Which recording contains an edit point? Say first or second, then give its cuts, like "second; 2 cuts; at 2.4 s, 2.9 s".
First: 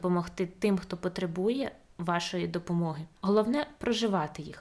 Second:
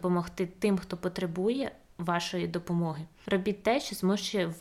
first; 1 cut; at 3.2 s